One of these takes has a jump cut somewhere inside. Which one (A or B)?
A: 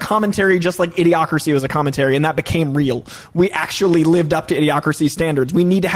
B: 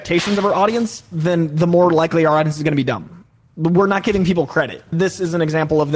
B